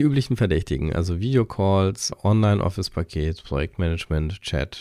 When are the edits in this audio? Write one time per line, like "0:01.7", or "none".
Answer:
none